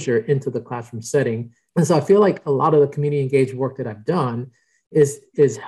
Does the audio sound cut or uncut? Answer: cut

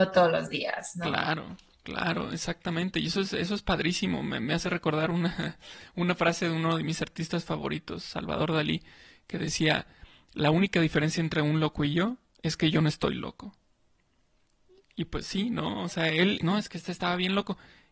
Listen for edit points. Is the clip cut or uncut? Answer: cut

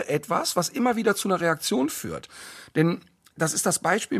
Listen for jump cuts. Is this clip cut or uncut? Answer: uncut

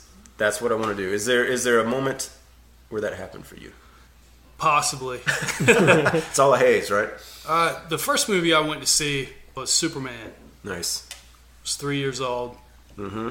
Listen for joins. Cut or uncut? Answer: uncut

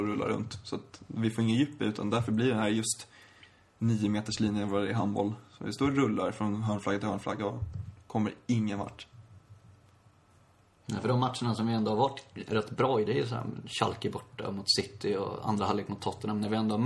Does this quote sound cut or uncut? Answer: uncut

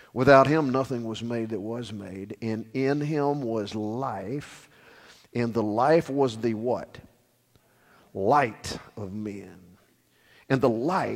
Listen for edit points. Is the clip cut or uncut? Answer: uncut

